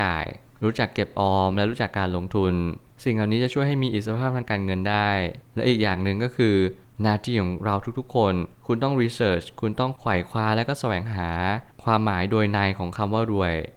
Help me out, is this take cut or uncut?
uncut